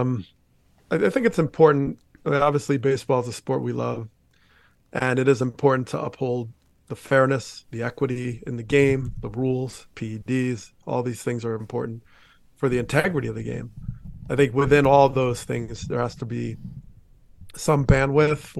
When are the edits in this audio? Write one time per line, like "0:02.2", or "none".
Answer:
0:11.6